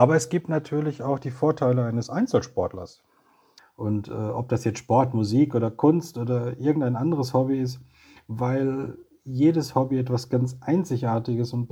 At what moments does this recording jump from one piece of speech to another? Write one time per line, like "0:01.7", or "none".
0:03.6